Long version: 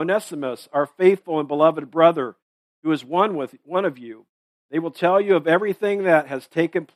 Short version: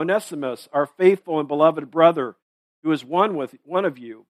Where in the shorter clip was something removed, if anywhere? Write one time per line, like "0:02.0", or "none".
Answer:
none